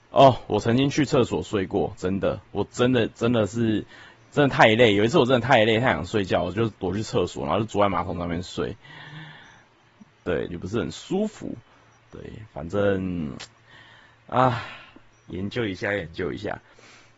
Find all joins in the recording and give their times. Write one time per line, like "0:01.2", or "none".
0:10.5